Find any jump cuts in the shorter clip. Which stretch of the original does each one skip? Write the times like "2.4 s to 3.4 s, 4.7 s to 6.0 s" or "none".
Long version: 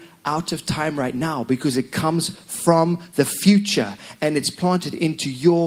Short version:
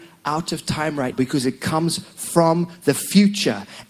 1.1 s to 1.4 s